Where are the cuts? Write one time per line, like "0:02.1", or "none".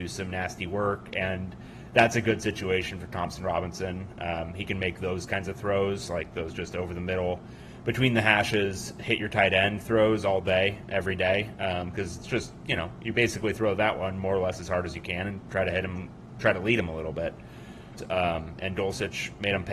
0:18.0